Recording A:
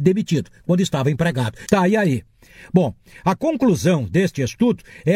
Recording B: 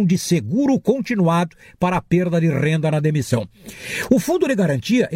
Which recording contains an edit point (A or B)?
A